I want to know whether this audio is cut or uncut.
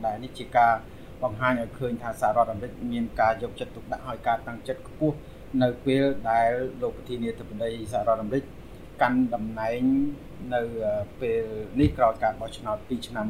uncut